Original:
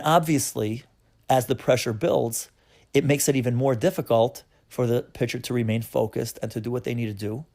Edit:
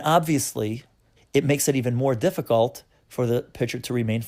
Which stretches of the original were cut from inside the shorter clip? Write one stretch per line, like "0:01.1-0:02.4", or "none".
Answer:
0:01.2-0:02.8